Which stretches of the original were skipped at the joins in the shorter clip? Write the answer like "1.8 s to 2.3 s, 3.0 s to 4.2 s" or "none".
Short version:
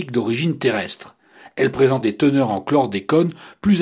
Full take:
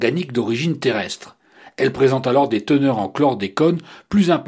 2.2 s to 2.5 s